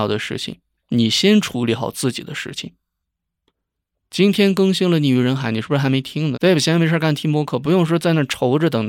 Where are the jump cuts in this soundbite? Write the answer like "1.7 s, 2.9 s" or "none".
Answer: 6.3 s